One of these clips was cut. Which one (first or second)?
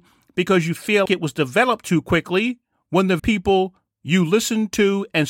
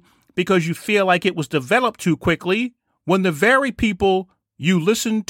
first